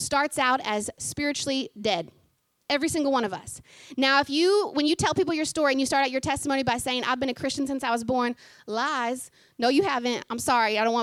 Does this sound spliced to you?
no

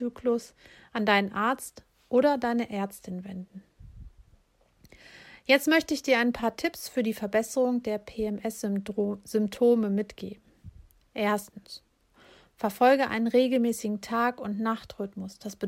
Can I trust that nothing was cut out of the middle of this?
yes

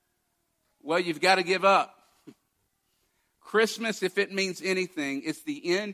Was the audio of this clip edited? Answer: no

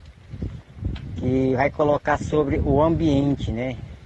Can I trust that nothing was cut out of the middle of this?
yes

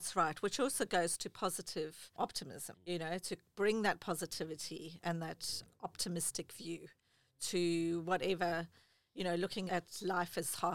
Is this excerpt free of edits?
no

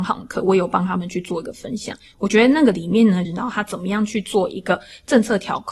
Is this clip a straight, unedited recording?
no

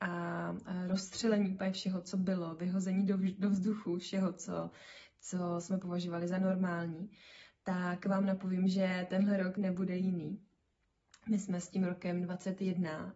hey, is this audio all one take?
no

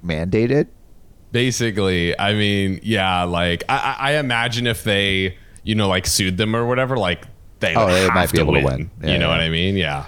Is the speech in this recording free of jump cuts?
yes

